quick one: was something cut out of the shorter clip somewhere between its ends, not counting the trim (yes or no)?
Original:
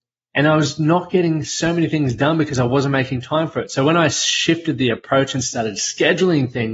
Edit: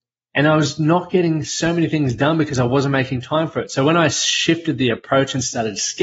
no